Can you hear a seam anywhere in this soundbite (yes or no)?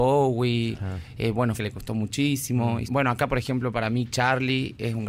yes